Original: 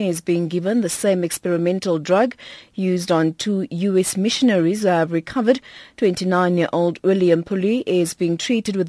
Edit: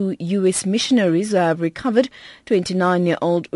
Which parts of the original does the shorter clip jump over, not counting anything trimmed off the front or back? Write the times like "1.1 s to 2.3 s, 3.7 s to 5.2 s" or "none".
none